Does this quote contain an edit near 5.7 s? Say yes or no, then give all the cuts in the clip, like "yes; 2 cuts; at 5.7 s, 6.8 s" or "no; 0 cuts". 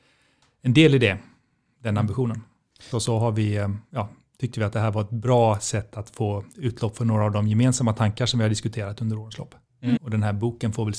no; 2 cuts; at 2.9 s, 10.0 s